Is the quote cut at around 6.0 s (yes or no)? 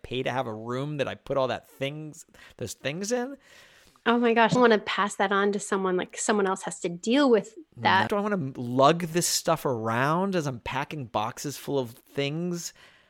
no